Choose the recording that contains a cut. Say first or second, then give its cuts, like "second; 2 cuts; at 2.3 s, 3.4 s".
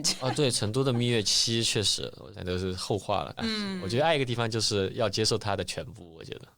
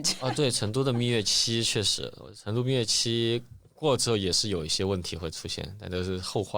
first; 2 cuts; at 2.3 s, 3.4 s